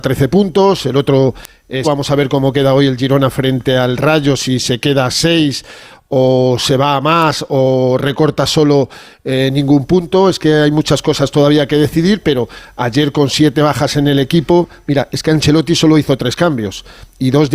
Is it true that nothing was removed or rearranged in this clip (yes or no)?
no